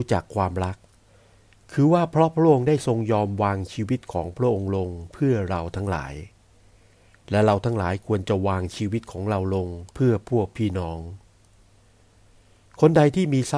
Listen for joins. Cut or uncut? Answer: cut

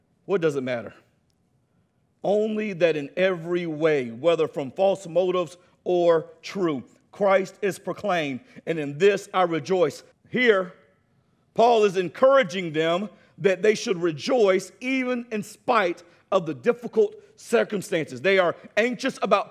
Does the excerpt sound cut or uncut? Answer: cut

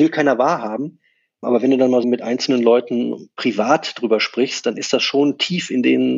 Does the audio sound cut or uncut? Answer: cut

